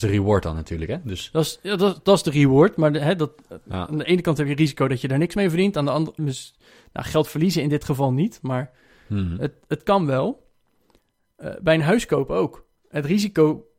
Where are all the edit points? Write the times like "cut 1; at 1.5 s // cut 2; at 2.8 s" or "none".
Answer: cut 1; at 6.2 s